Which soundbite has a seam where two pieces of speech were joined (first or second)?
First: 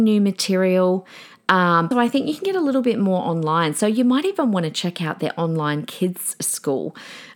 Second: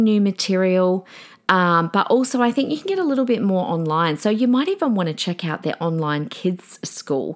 first